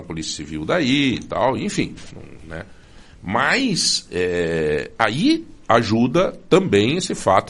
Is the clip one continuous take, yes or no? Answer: yes